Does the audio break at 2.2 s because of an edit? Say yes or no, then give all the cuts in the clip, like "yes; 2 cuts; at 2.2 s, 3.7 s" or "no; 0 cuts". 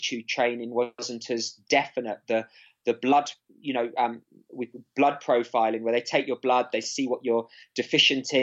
no; 0 cuts